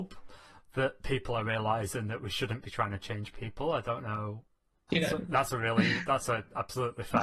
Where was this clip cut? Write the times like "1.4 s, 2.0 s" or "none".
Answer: 4.9 s